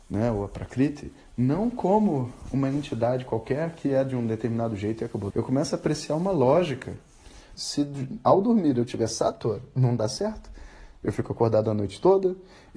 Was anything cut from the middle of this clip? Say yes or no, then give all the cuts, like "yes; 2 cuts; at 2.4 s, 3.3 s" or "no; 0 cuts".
yes; 2 cuts; at 5.3 s, 7.5 s